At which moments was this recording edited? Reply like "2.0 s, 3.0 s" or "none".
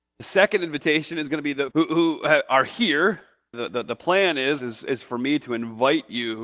1.7 s, 3.5 s, 4.6 s

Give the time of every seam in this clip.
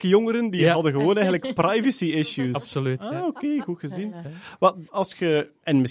4.9 s

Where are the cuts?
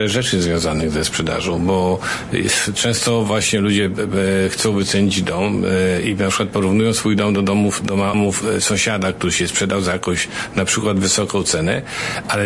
8.1 s

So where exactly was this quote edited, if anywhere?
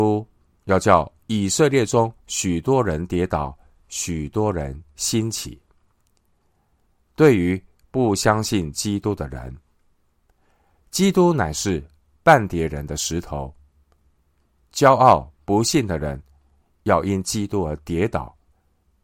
none

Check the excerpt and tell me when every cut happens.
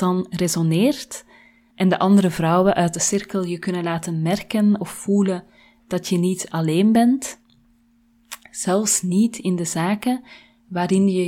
1.7 s

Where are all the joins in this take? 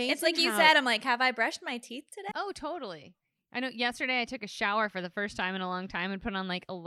2.3 s

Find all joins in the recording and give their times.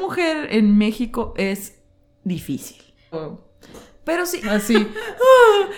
3.1 s, 4.4 s

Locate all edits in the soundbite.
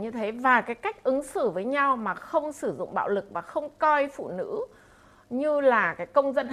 none

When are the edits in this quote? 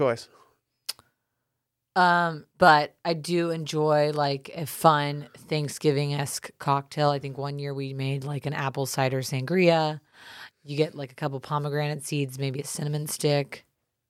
2.5 s, 10.5 s

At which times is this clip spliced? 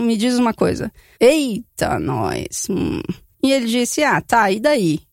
1.2 s, 3.3 s

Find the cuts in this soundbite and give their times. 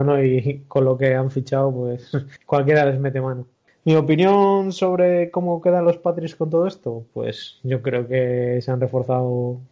3.7 s

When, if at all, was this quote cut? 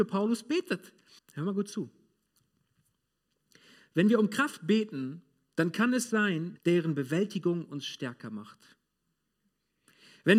1.2 s, 6.6 s

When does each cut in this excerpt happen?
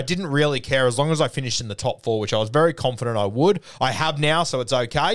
none

